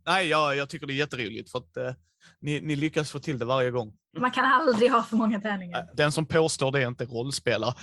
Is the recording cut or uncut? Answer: cut